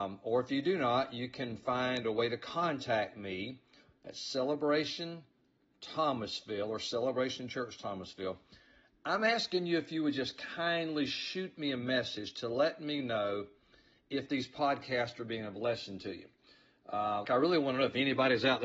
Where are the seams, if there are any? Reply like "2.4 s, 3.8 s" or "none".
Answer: 17.2 s